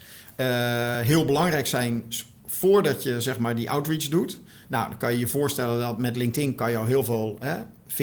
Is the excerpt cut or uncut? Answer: uncut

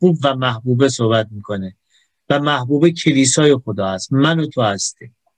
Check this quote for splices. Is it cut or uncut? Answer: uncut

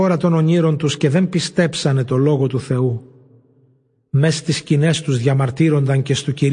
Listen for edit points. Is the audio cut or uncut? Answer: uncut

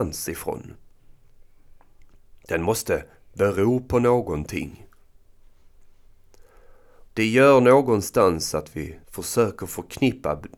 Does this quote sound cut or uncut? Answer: cut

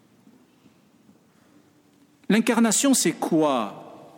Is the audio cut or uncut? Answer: uncut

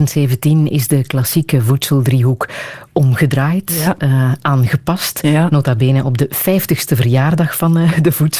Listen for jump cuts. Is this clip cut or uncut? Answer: uncut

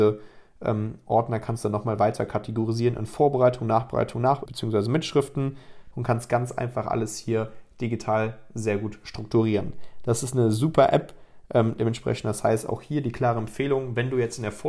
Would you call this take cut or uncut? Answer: cut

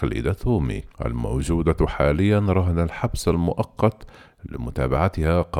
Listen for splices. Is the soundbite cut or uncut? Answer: cut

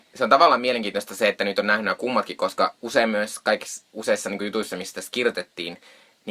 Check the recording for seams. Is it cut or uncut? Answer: uncut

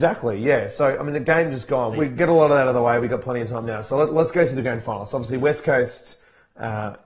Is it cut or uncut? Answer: cut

